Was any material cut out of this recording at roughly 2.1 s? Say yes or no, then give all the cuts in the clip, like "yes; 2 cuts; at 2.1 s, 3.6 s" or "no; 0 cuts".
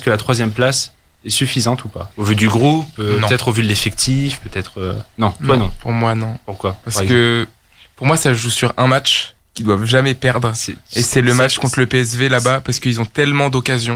yes; 1 cut; at 2.1 s